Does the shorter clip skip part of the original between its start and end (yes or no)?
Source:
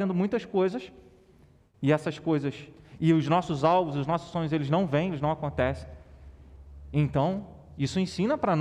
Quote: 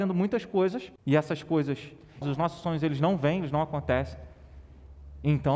yes